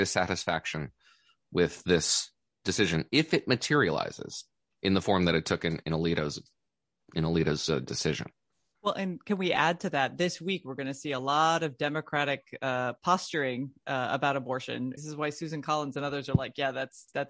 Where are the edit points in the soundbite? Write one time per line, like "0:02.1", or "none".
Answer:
0:15.0